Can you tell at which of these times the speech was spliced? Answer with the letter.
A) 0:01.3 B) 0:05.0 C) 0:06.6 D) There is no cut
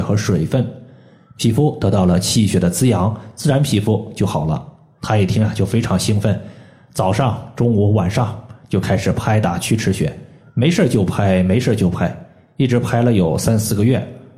B